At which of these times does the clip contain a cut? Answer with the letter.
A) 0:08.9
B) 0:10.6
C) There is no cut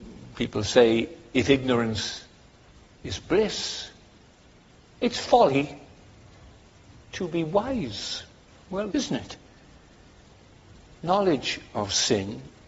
A